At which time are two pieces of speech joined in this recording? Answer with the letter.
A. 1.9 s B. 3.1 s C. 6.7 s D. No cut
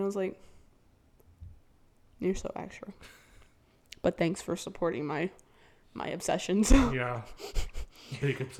D